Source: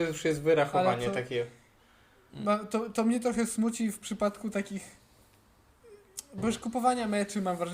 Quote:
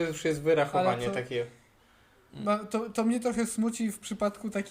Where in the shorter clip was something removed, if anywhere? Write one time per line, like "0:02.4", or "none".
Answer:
none